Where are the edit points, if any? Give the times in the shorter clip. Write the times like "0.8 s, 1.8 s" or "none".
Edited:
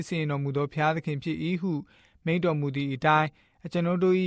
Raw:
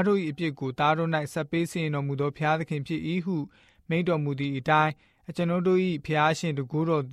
none

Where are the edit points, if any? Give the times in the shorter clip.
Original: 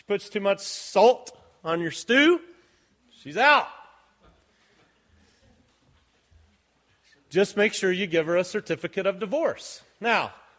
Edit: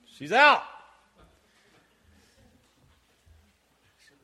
none

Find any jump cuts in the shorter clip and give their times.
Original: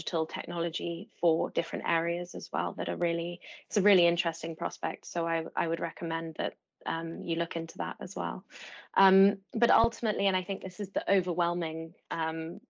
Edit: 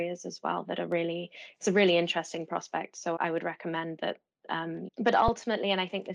3.2 s, 4.9 s

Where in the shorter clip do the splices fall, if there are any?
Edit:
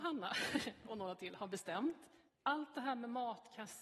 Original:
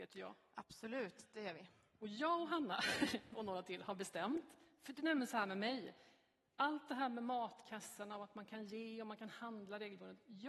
2.3 s

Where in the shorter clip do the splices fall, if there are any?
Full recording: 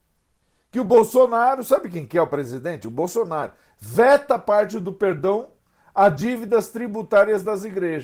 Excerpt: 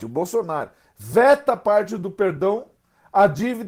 none

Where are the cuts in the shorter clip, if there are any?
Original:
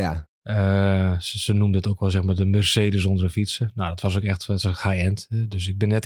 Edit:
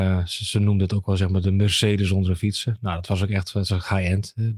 none

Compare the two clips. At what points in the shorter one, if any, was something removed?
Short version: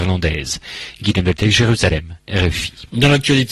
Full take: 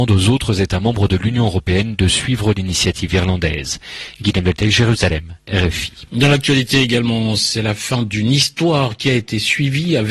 none

